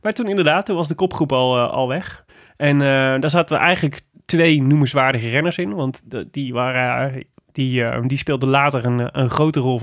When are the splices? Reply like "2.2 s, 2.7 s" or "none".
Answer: none

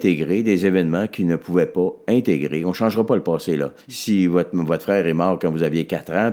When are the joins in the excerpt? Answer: 3.8 s

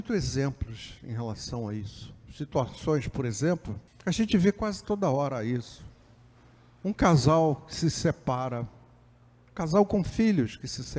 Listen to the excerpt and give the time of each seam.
3.9 s

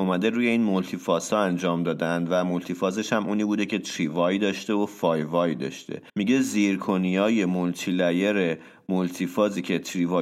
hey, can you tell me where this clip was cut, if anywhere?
6.1 s

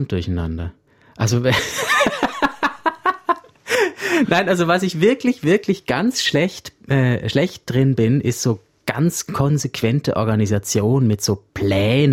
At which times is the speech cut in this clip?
none

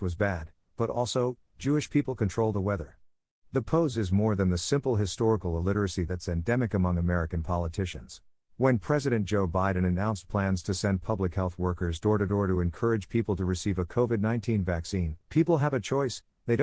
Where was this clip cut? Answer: 8.5 s, 15.2 s

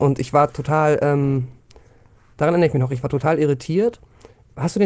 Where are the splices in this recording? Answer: none

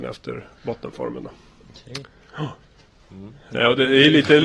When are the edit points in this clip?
none

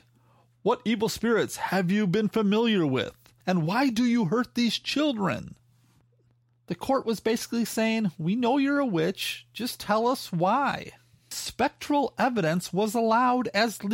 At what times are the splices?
none

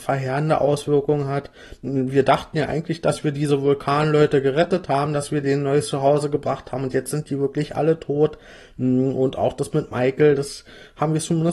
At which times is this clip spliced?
none

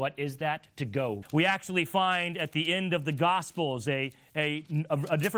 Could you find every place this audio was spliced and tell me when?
1.2 s

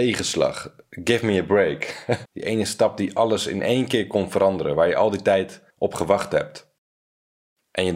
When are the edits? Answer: 2.3 s, 5.7 s

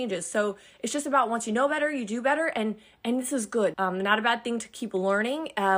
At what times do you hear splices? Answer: 3.7 s

